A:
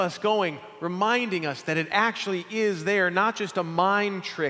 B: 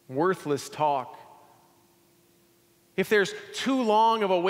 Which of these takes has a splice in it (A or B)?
B